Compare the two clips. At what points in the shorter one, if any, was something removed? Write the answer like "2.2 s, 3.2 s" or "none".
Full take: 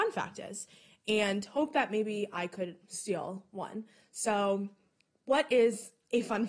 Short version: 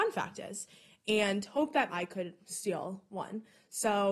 1.9 s

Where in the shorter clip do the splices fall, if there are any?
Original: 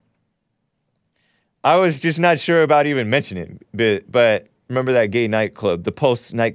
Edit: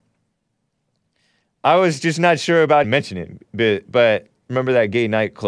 2.8 s

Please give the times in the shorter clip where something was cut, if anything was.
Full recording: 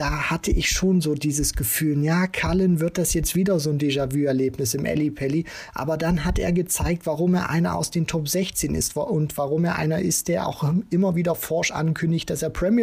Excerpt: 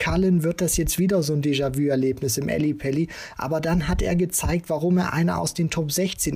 none

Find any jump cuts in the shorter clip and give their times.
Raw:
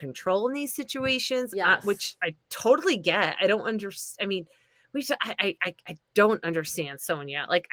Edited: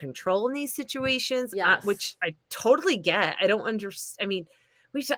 none

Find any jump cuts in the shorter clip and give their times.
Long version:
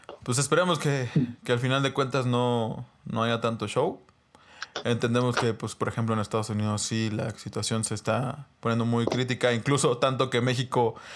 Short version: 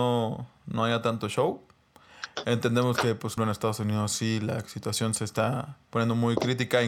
3.4 s

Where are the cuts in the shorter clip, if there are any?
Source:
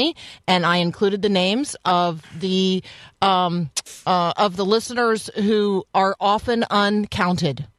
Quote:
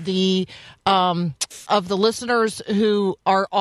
1.7 s

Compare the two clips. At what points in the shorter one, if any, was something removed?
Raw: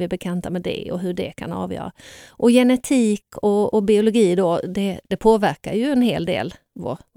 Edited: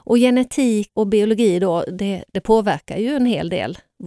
1.0 s

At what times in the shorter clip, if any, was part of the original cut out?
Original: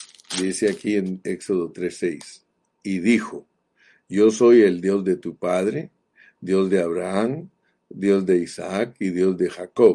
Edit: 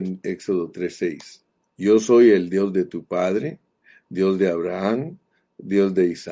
1.7 s

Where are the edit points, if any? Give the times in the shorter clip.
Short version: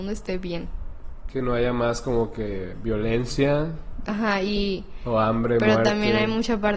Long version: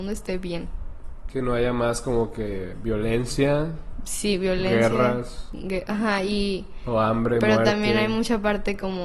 4.1 s

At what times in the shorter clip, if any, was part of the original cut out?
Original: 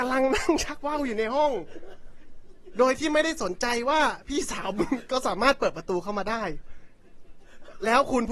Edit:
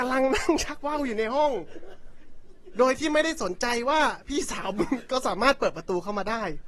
none

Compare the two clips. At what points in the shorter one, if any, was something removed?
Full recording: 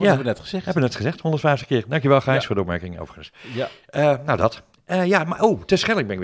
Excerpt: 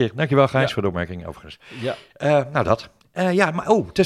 none

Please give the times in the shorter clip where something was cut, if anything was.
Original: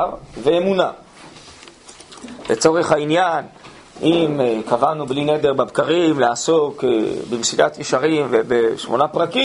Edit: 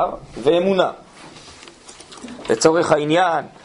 none

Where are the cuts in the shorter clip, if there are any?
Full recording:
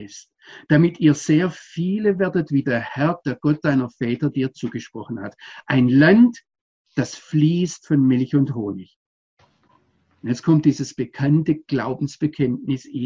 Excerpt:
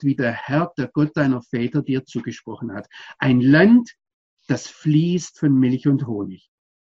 none

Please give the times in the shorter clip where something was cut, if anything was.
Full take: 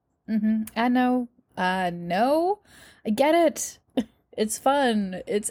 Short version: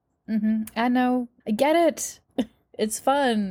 1.4 s

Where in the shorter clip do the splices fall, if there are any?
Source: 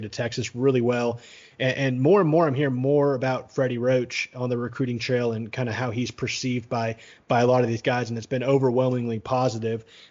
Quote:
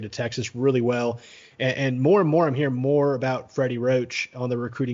none

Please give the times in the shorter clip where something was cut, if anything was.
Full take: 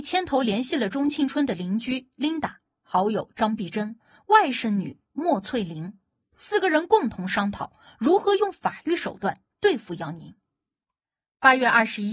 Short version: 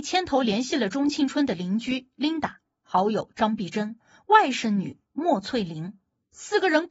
none

